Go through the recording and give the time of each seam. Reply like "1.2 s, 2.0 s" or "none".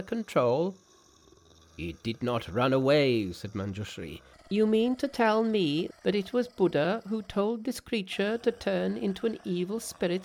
4.3 s, 5.9 s